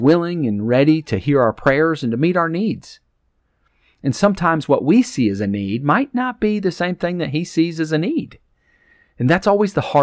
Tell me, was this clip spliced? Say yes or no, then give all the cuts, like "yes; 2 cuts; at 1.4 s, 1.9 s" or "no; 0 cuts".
no; 0 cuts